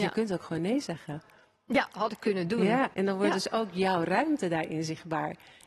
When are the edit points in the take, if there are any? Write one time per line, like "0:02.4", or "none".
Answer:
0:02.9